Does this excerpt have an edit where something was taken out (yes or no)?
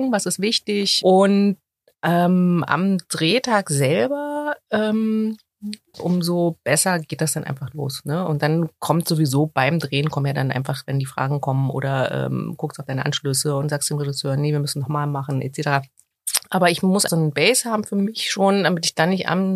yes